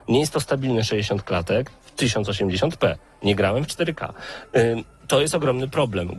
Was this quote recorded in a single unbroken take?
yes; 0 cuts

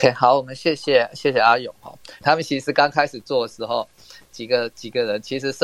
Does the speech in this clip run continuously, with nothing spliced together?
no; 1 cut; at 2.2 s

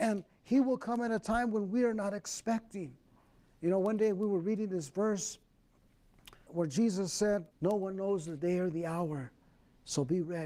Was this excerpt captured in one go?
no; 2 cuts; at 6.5 s, 7.5 s

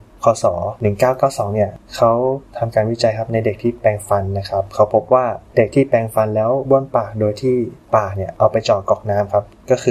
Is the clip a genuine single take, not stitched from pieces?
yes; 0 cuts

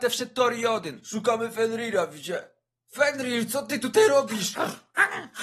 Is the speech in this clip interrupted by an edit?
no; 0 cuts

